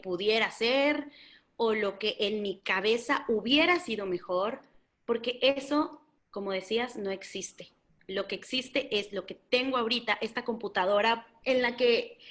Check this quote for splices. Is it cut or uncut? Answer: uncut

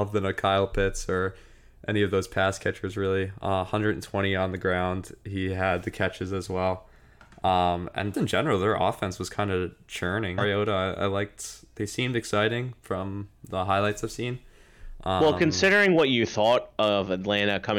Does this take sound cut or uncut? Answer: cut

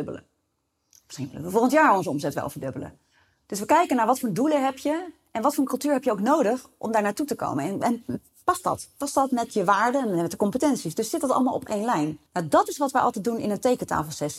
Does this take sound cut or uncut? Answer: cut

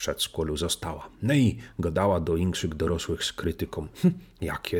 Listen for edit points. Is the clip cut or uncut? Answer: uncut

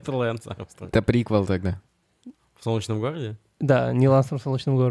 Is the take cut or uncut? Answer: uncut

